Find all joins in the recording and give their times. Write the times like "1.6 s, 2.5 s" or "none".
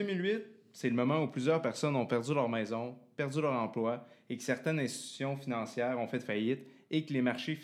none